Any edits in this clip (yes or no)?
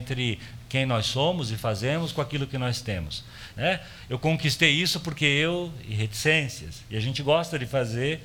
yes